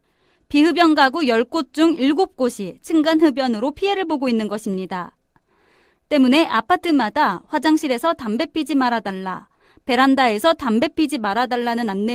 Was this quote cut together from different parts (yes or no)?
no